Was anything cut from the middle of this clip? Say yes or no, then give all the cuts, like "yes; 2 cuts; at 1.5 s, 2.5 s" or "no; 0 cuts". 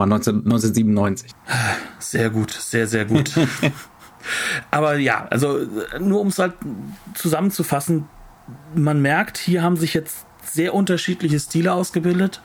no; 0 cuts